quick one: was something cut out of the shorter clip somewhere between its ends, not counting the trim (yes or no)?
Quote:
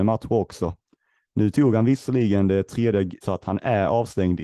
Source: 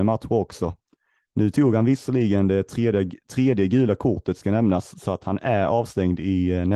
yes